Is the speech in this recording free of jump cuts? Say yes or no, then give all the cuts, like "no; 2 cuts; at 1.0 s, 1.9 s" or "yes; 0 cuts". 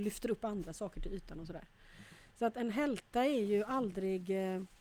yes; 0 cuts